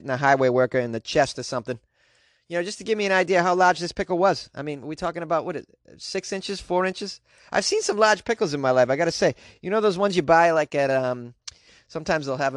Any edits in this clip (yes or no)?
no